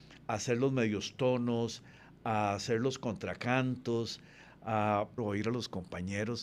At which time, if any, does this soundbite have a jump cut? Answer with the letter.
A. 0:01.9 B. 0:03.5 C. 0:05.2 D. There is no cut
C